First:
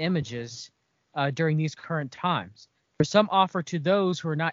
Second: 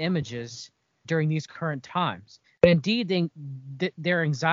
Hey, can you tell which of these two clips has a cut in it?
second; 2 cuts; at 1.0 s, 2.4 s

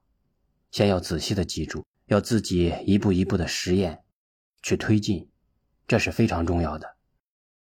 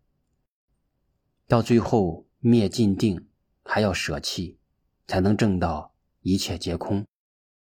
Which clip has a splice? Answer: first; 1 cut; at 1.9 s

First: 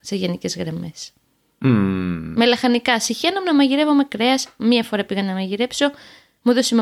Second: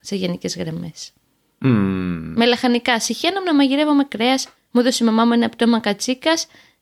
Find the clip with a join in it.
second; 1 cut; at 4.6 s

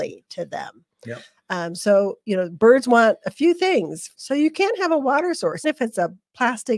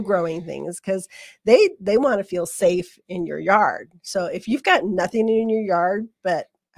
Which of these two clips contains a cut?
first; 2 cuts; at 4.1 s, 5.6 s

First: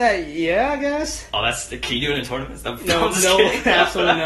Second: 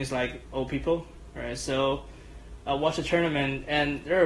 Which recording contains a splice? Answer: second; 1 cut; at 1.3 s

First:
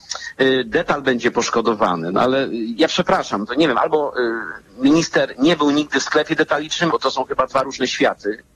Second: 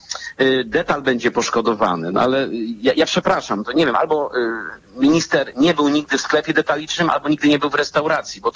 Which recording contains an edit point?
first; 2 cuts; at 2.8 s, 6.9 s

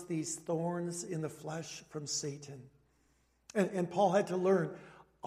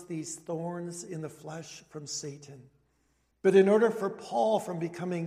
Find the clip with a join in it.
second; 1 cut; at 3.3 s

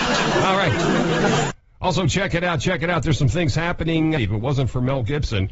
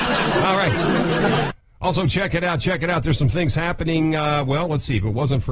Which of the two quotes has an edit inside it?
first; 1 cut; at 4.2 s

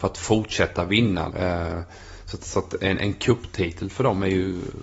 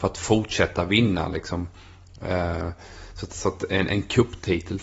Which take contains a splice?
first; 1 cut; at 1.3 s

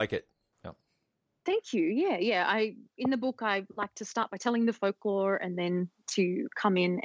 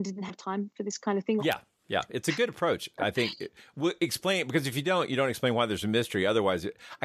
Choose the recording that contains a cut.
second; 1 cut; at 1.4 s

